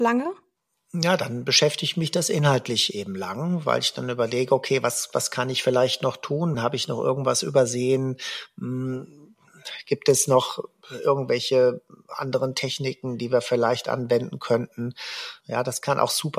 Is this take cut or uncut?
cut